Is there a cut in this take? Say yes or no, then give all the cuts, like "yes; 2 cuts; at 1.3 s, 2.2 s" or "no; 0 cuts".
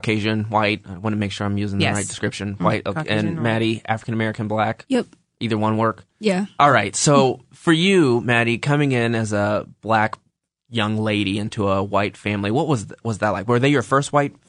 no; 0 cuts